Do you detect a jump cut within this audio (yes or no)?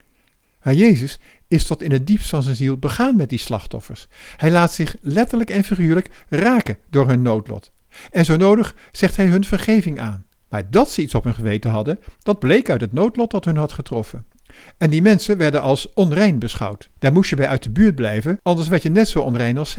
yes